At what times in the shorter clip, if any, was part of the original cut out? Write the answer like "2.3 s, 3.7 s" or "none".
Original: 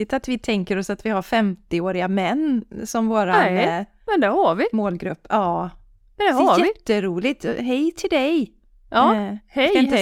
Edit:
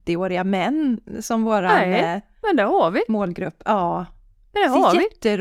none